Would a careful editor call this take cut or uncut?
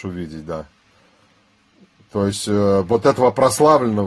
uncut